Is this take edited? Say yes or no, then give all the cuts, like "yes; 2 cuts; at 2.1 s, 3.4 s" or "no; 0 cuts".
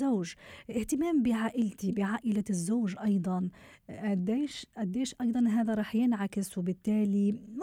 no; 0 cuts